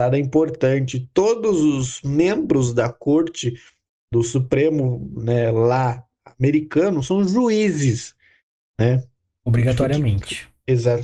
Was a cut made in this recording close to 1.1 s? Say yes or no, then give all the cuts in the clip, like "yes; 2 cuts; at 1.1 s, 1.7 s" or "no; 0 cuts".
no; 0 cuts